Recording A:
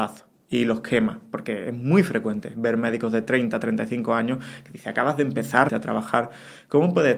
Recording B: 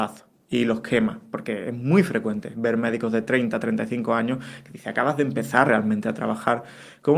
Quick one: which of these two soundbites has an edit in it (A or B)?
A